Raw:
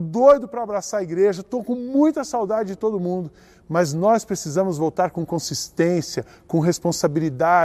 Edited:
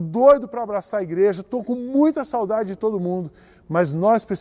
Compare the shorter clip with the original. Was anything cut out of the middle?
no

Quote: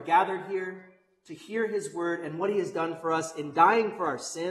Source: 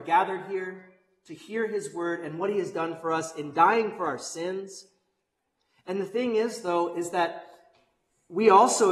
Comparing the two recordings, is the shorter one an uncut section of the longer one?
yes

